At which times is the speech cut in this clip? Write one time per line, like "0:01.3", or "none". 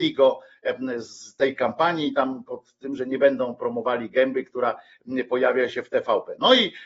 none